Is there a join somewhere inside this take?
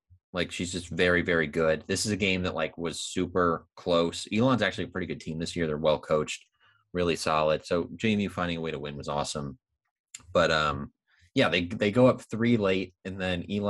no; 0 cuts

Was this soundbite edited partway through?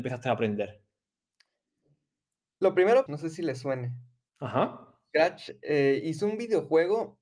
yes; 1 cut; at 3.1 s

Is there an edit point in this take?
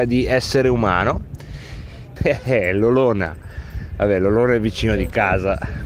yes; 1 cut; at 2.2 s

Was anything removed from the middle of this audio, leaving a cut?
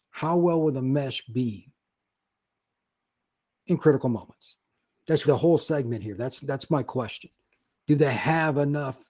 yes; 2 cuts; at 5.2 s, 7.8 s

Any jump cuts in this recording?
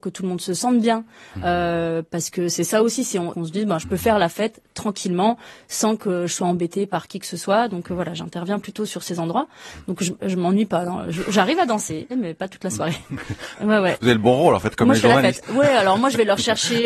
yes; 3 cuts; at 3.3 s, 12.1 s, 13.5 s

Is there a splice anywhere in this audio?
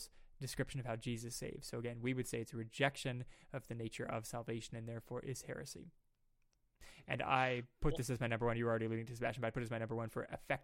no; 0 cuts

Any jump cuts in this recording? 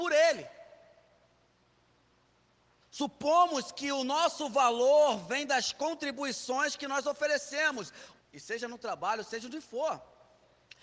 yes; 2 cuts; at 2.8 s, 8.2 s

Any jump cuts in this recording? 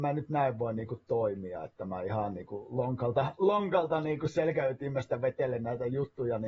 no; 0 cuts

